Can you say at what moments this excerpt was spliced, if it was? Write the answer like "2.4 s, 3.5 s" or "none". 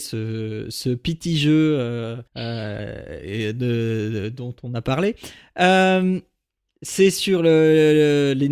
2.3 s